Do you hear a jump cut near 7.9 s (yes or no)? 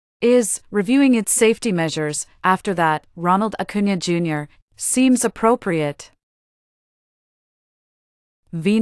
no